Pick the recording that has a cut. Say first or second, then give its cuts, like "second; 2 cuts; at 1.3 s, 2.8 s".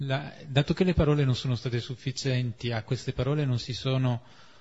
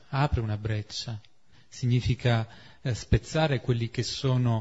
second; 1 cut; at 1.5 s